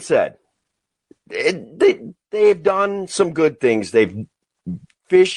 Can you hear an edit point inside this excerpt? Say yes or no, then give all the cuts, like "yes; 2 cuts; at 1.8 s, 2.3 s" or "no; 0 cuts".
no; 0 cuts